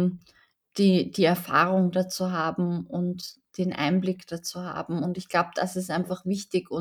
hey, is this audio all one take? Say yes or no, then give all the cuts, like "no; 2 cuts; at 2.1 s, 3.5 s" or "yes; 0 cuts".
yes; 0 cuts